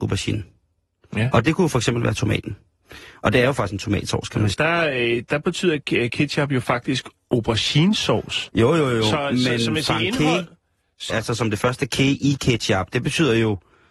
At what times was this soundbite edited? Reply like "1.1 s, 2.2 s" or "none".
4.5 s, 11.1 s